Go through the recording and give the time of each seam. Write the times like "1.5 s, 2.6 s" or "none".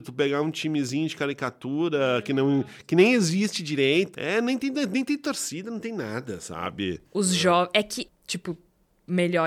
4.1 s, 7.1 s, 8.1 s